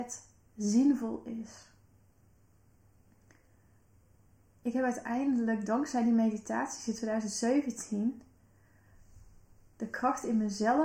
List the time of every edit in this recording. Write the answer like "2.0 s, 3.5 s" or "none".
9.7 s